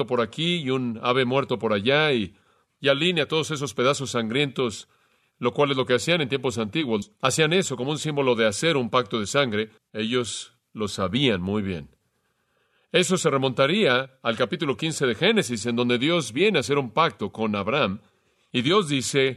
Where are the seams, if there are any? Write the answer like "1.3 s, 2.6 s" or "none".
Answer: 9.8 s